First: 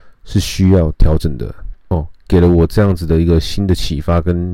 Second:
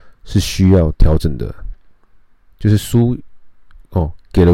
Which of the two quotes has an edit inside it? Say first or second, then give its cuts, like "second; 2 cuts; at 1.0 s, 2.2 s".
first; 1 cut; at 1.9 s